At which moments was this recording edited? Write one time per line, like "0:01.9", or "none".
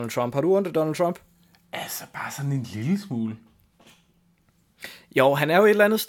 none